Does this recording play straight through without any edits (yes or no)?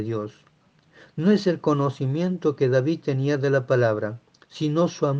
yes